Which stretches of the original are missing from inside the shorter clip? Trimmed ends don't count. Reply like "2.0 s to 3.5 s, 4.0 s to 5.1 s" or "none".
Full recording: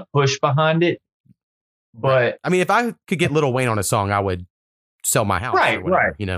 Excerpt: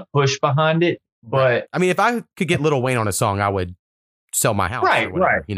1.1 s to 1.8 s